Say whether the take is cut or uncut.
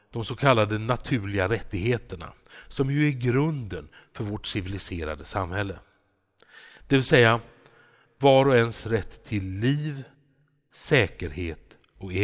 uncut